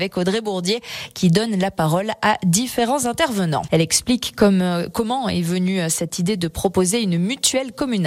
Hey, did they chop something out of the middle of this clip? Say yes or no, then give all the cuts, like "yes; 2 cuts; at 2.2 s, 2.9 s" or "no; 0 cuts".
yes; 1 cut; at 3.7 s